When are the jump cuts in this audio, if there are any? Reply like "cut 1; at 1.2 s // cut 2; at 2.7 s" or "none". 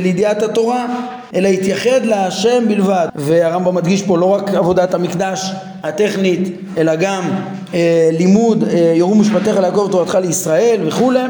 cut 1; at 1.3 s // cut 2; at 3.1 s